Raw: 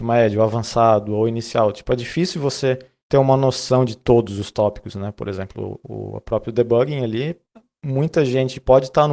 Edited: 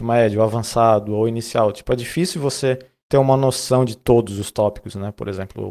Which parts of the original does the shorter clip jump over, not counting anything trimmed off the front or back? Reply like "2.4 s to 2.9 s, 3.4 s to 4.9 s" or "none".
none